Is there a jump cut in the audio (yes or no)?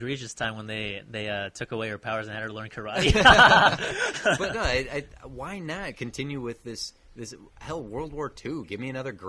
no